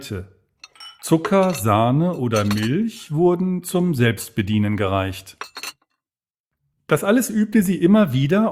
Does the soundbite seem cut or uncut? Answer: uncut